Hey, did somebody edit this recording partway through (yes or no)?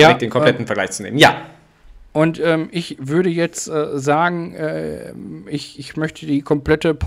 no